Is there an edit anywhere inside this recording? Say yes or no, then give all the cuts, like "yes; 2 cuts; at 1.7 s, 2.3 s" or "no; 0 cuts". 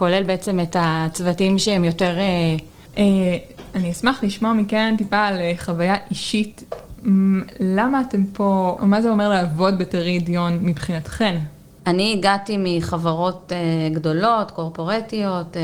yes; 3 cuts; at 2.9 s, 8.8 s, 11.8 s